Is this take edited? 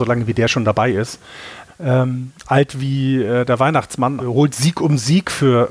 yes; 2 cuts; at 1.7 s, 4.2 s

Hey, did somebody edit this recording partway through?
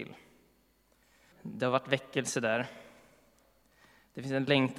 yes; 1 cut; at 1.3 s

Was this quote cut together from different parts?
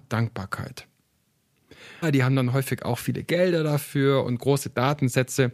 yes; 1 cut; at 2.0 s

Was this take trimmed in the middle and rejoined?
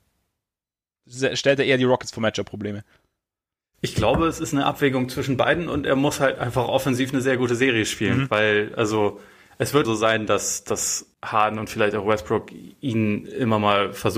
yes; 2 cuts; at 9.8 s, 11.1 s

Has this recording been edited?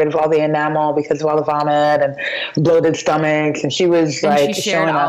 no; 0 cuts

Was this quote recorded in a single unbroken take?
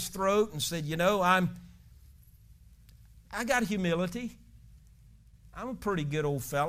yes; 0 cuts

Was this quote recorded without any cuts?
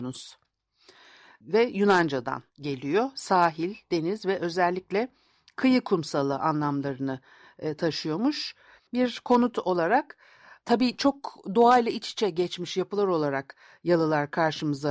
no; 2 cuts; at 2.5 s, 8.8 s

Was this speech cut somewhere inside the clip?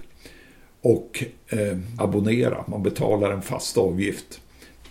yes; 1 cut; at 2.0 s

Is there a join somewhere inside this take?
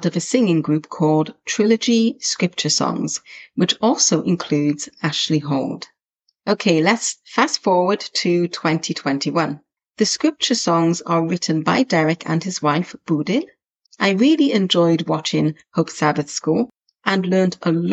yes; 2 cuts; at 9.8 s, 13.9 s

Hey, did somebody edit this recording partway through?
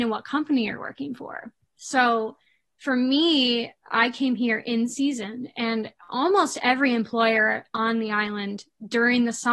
no; 0 cuts

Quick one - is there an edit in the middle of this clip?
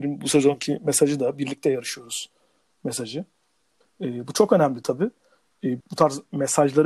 yes; 2 cuts; at 3.8 s, 5.8 s

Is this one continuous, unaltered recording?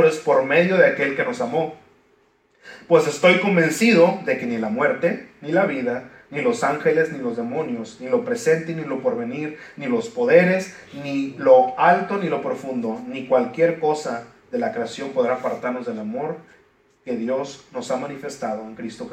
yes; 0 cuts

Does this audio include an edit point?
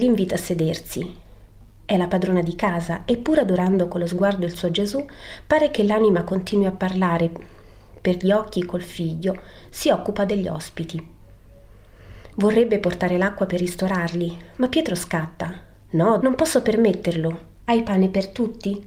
yes; 2 cuts; at 16.2 s, 17.6 s

